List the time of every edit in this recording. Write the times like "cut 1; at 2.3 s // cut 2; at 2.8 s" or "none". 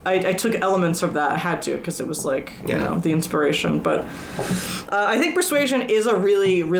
none